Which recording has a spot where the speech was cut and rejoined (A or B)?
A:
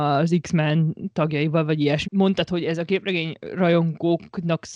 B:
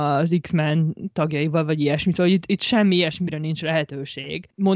A